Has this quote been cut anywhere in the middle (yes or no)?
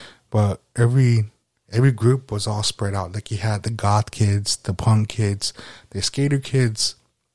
no